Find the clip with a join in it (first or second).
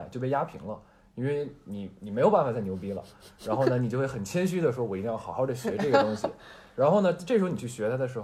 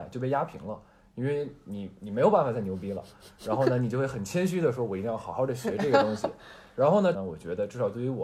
second